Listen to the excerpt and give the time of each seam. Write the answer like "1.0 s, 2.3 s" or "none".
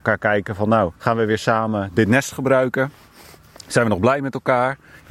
1.0 s